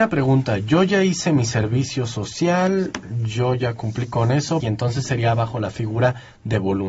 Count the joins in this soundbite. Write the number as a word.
one